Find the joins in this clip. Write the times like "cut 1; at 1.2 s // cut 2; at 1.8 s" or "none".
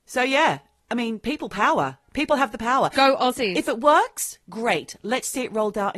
none